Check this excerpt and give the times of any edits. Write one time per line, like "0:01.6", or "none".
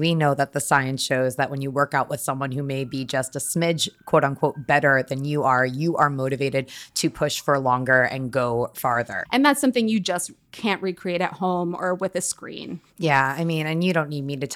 0:09.3